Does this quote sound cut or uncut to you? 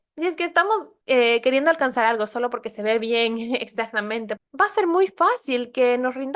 cut